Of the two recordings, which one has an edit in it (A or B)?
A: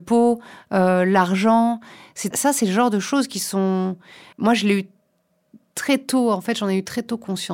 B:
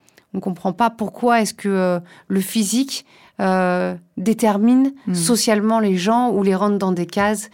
A